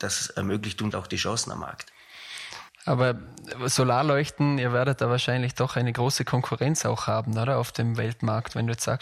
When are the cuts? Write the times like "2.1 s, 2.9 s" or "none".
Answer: 0.9 s